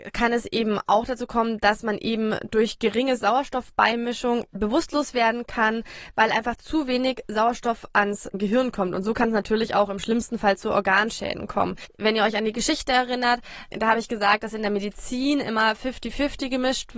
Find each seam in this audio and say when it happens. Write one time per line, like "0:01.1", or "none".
none